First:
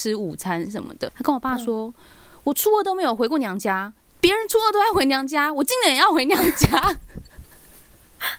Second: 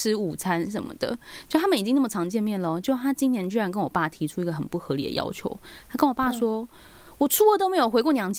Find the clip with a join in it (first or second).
first